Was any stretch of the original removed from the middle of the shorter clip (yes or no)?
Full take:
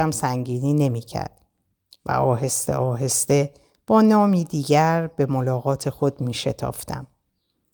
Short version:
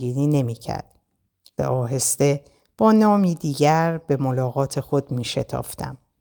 yes